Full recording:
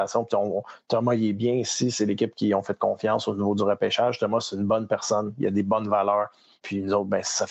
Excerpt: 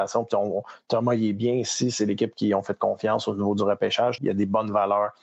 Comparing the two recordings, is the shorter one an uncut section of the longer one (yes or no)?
no